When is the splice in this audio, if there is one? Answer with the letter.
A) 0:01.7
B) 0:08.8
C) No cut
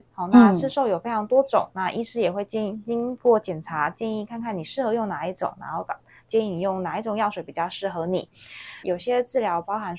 B